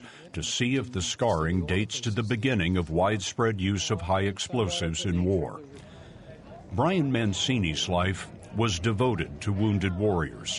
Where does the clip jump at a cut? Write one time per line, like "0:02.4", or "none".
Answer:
none